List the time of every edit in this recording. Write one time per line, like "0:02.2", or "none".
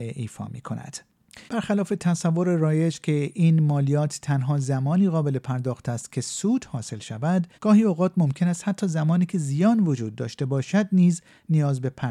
0:01.5
0:07.5